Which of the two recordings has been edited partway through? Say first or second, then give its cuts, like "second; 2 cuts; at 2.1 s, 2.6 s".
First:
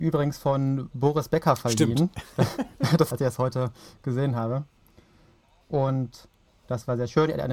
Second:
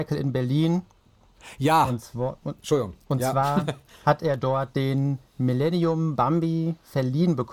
first; 2 cuts; at 3.1 s, 5.6 s